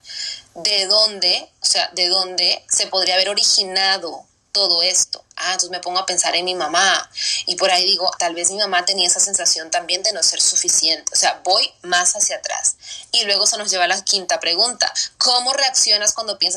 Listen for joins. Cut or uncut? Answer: cut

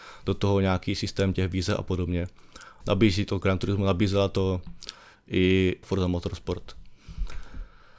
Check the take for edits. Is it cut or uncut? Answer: cut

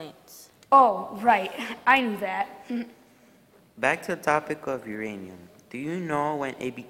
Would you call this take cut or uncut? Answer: uncut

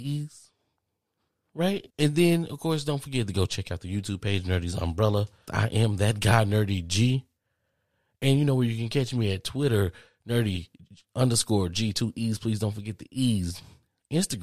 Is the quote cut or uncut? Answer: cut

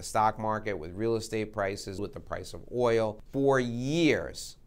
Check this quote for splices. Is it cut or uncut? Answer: cut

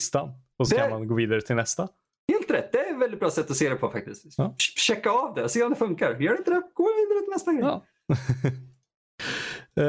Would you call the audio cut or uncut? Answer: uncut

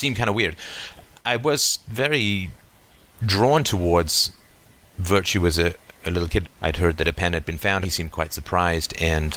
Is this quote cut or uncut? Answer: cut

